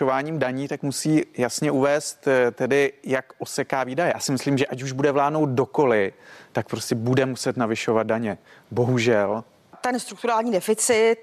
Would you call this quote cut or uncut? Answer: uncut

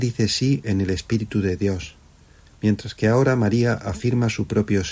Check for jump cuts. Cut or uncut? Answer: cut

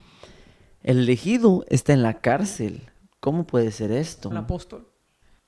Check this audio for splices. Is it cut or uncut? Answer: cut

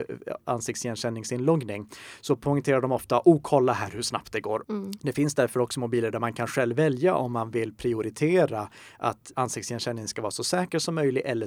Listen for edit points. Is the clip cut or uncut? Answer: cut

